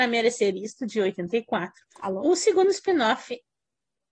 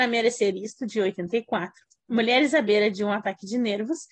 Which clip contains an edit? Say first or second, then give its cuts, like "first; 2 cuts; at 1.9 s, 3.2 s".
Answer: first; 1 cut; at 1.9 s